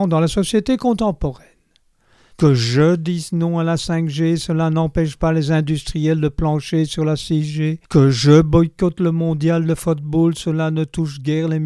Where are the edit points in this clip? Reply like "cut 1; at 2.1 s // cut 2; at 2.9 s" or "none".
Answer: cut 1; at 2.3 s // cut 2; at 7.8 s